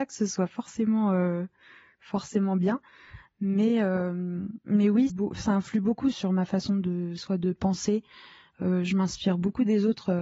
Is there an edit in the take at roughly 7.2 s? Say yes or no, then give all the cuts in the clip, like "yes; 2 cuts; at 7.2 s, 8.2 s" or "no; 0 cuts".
yes; 3 cuts; at 5.1 s, 6.1 s, 7.2 s